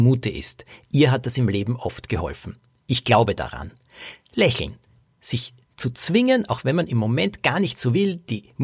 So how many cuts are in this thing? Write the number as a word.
zero